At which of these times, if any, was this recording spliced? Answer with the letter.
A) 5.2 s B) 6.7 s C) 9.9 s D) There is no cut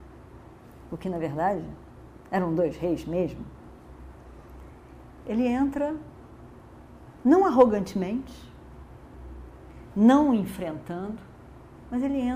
A